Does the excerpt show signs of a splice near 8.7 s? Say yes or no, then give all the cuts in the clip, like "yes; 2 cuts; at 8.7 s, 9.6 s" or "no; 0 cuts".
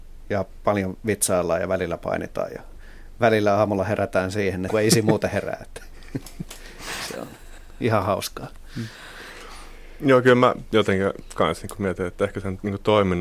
no; 1 cut; at 4.7 s